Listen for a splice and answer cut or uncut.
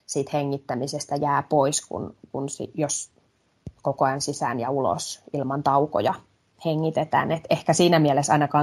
uncut